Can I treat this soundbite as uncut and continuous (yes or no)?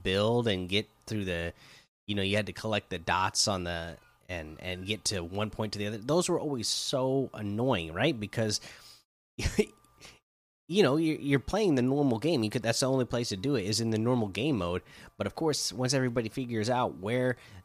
yes